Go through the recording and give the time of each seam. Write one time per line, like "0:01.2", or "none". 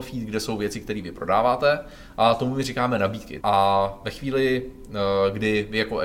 0:03.4